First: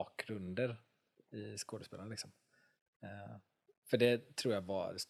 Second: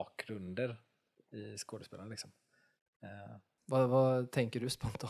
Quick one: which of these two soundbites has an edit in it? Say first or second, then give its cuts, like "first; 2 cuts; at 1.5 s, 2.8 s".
second; 1 cut; at 3.6 s